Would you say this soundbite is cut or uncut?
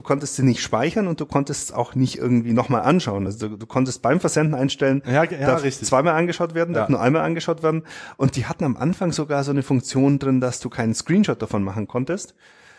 uncut